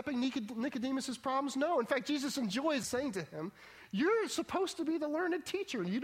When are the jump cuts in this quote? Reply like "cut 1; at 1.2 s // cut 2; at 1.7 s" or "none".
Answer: cut 1; at 2.8 s

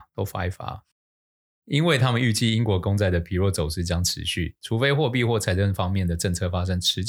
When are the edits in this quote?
cut 1; at 1.6 s

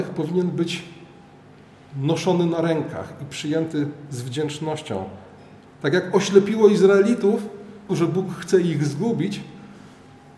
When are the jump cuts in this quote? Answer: cut 1; at 5.7 s // cut 2; at 7.9 s

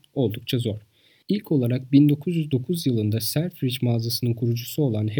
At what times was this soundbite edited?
cut 1; at 1.2 s

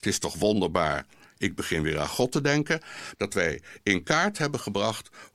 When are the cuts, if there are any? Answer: cut 1; at 3.1 s

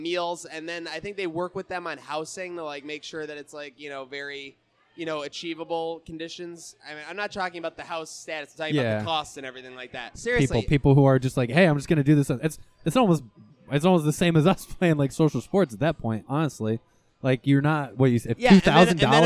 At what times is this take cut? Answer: cut 1; at 10.1 s

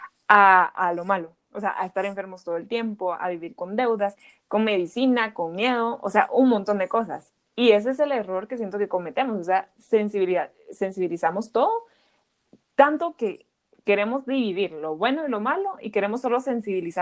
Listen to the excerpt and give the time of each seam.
cut 1; at 4.1 s

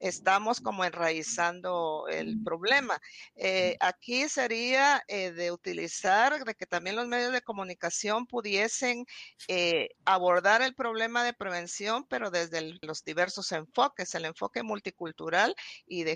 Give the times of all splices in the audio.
cut 1; at 9.9 s // cut 2; at 12.8 s

